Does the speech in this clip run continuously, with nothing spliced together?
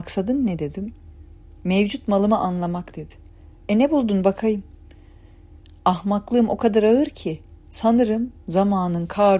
yes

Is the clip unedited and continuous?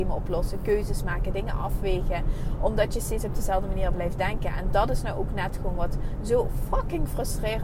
yes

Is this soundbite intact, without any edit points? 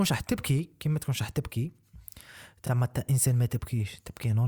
yes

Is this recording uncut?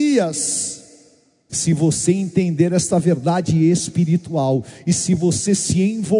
no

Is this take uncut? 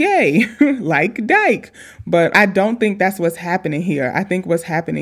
no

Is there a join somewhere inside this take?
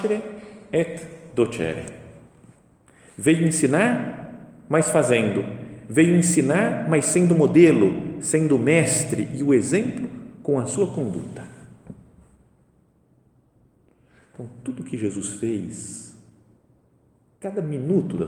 no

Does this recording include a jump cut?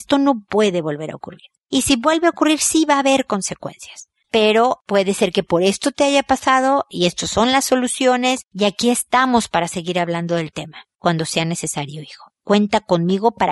no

